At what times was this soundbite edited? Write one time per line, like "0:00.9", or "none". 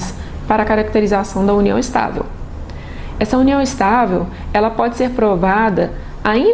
none

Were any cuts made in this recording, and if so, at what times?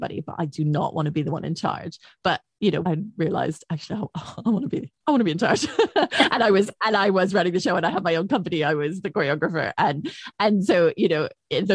0:02.8

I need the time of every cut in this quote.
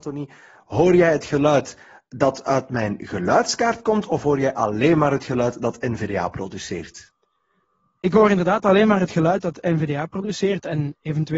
none

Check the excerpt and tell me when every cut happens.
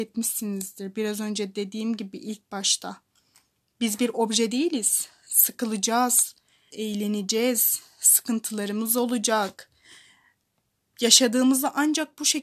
0:06.7

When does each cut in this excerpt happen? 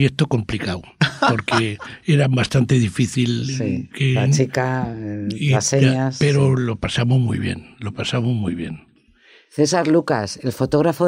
none

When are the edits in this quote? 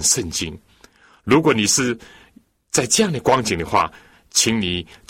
none

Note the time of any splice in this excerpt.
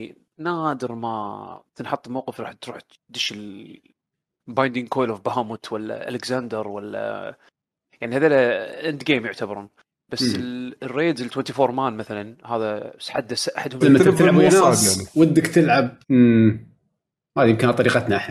0:13.8
0:16.0

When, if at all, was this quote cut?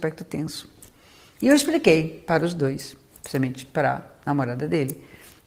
none

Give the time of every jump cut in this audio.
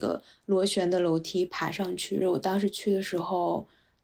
0:02.2

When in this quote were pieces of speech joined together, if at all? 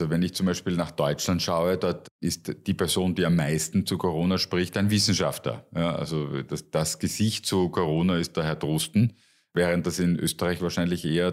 none

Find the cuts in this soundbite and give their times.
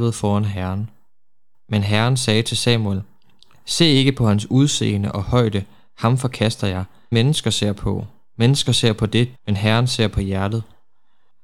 0:07.1
0:09.3

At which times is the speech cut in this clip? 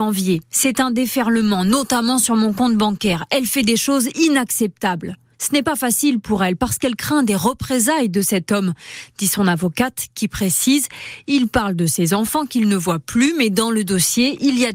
0:05.3

